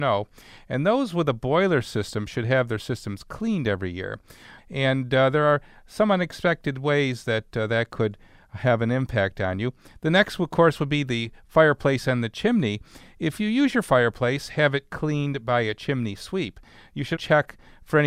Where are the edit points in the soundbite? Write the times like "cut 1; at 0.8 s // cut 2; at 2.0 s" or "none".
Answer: cut 1; at 4.6 s // cut 2; at 17.2 s